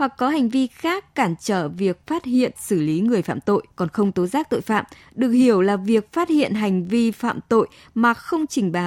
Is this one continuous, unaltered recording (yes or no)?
no